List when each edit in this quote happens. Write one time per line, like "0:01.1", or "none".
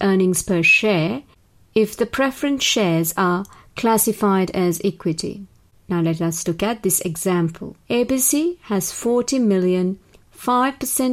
0:07.8